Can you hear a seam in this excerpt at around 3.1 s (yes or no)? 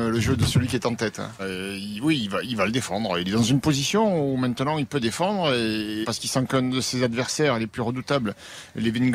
no